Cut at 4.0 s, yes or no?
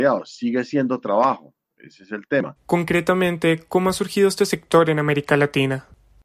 no